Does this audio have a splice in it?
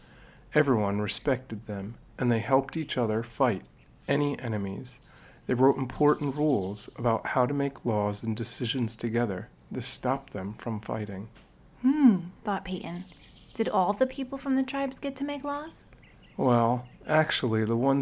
no; 0 cuts

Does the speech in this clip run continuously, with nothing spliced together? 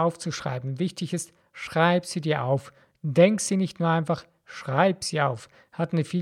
yes; 0 cuts

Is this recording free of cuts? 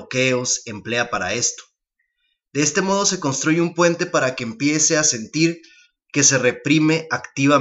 yes; 0 cuts

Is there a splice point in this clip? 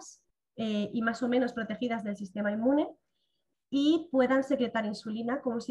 no; 0 cuts

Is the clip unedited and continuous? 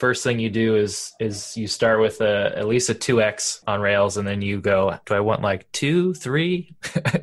yes; 0 cuts

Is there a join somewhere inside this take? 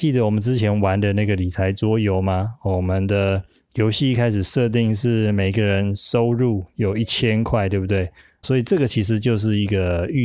yes; 1 cut; at 8.4 s

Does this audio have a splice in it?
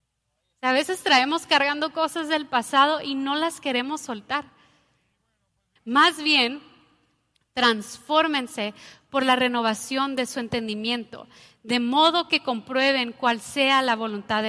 yes; 1 cut; at 5.8 s

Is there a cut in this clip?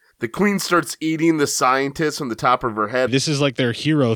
yes; 1 cut; at 3.1 s

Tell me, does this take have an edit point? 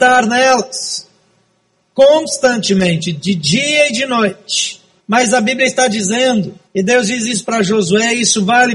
yes; 2 cuts; at 5.0 s, 6.6 s

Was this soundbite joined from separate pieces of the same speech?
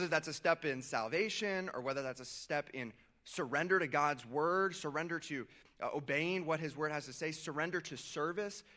no; 0 cuts

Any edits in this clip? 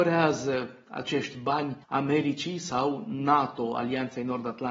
yes; 1 cut; at 1.8 s

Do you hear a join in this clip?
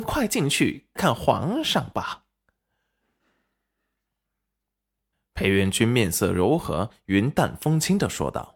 yes; 1 cut; at 1.0 s

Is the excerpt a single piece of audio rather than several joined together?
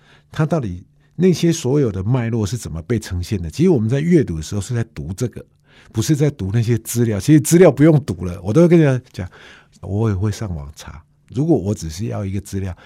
no; 1 cut; at 9.8 s

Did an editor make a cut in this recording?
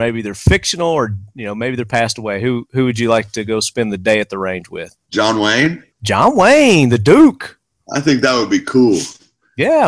yes; 1 cut; at 5.9 s

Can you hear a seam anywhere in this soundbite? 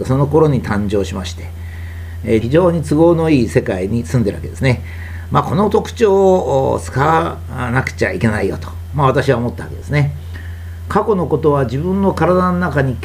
yes; 1 cut; at 2.4 s

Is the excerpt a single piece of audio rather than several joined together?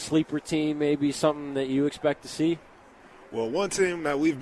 yes; 0 cuts

